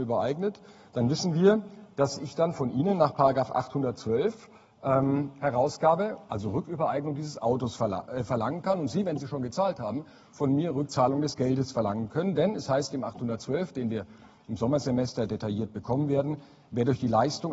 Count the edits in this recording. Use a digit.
0